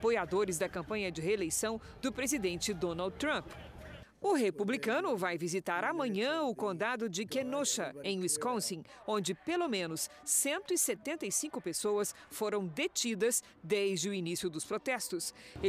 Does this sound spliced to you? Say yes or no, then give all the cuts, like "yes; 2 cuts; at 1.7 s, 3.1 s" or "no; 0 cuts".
no; 0 cuts